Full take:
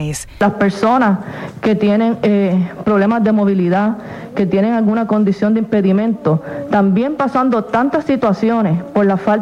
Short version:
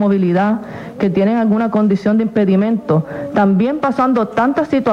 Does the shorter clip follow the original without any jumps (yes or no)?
yes